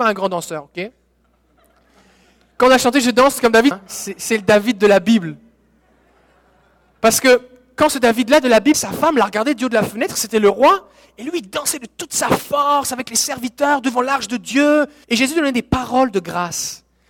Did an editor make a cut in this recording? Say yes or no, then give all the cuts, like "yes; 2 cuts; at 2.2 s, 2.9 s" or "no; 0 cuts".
yes; 3 cuts; at 3.7 s, 8.7 s, 15.0 s